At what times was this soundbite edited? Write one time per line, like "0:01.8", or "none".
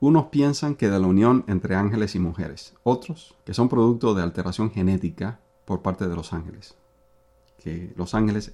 0:03.4